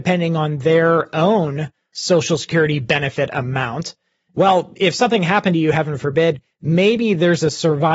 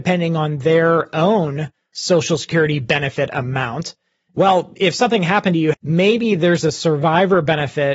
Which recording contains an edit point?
second; 1 cut; at 5.7 s

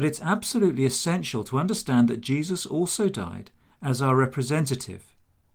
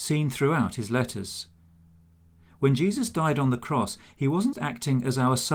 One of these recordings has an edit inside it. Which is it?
second; 1 cut; at 4.5 s

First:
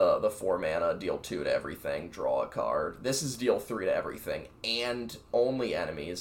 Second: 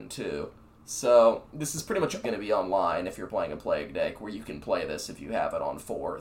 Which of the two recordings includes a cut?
second; 1 cut; at 2.2 s

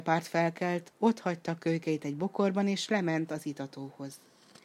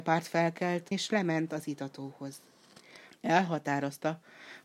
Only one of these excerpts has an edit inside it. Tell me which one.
second; 2 cuts; at 0.9 s, 3.1 s

